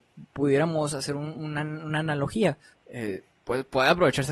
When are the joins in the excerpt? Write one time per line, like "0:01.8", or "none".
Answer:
0:02.7